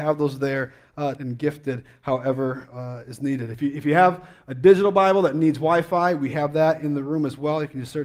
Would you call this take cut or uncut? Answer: cut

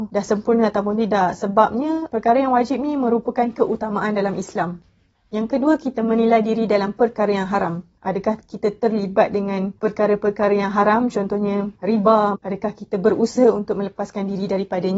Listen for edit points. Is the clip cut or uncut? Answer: cut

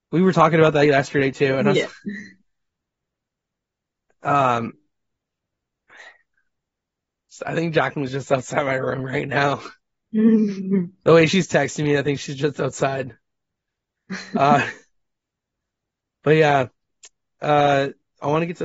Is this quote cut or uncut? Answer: uncut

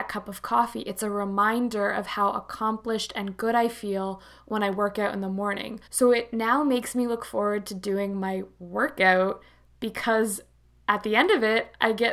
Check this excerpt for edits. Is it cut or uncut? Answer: cut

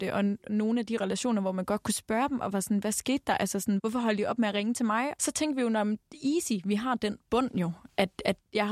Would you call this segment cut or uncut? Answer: cut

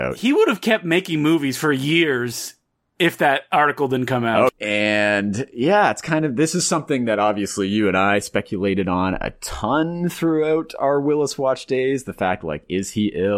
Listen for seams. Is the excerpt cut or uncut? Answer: cut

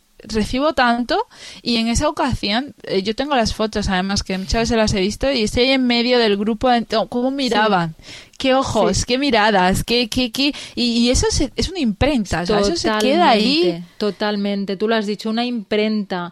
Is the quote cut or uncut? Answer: uncut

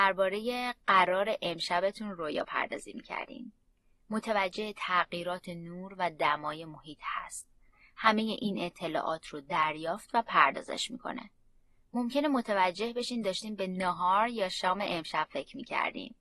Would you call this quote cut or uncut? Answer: cut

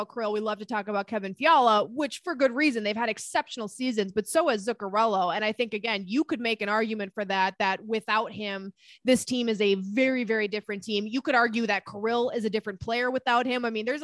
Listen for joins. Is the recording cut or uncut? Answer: uncut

